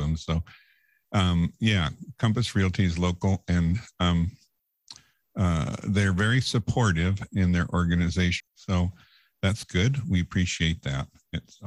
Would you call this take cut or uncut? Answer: cut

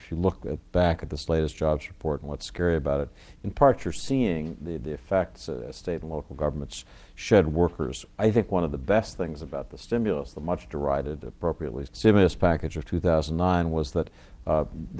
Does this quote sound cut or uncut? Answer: cut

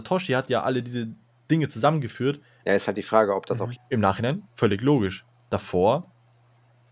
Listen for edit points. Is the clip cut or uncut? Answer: cut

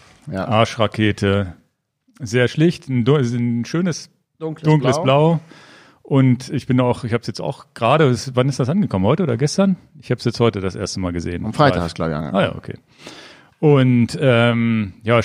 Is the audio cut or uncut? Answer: uncut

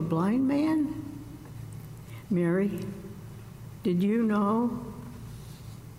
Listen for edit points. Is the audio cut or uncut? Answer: cut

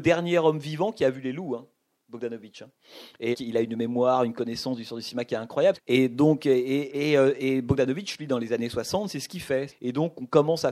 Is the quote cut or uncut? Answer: cut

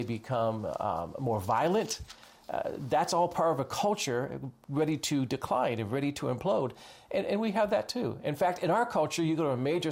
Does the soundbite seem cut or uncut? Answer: uncut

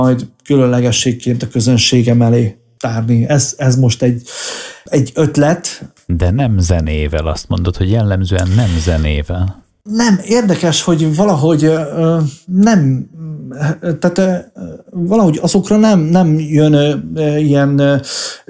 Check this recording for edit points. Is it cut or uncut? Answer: uncut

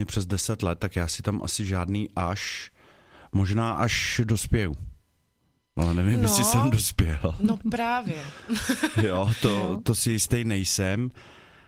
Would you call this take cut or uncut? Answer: uncut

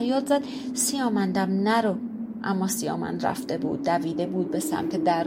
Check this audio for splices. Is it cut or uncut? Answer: uncut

